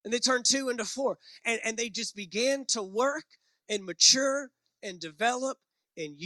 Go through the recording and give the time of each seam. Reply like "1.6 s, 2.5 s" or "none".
none